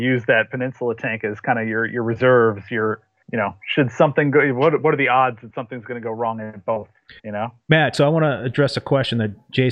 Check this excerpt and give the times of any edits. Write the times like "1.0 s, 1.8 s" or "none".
3.2 s, 7.2 s